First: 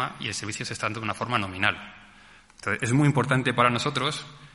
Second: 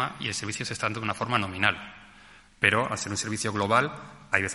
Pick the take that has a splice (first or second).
first